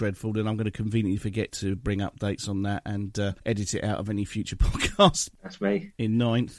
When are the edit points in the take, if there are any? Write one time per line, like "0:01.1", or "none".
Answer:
0:05.3